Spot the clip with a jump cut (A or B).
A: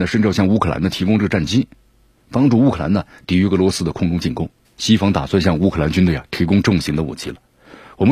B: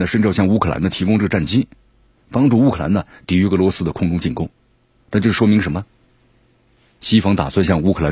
A